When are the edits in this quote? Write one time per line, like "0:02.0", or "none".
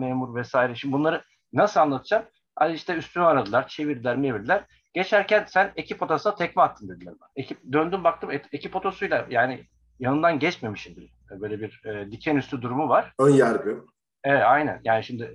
0:07.3
0:11.2